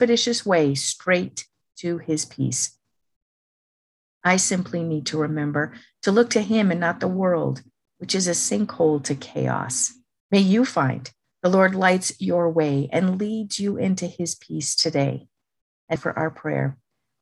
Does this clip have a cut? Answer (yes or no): yes